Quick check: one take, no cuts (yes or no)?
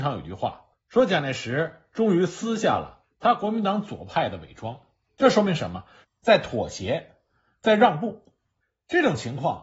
no